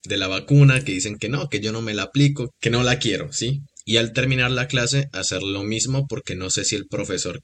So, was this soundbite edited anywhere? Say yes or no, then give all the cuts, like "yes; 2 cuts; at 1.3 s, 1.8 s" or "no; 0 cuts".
yes; 2 cuts; at 2.5 s, 3.8 s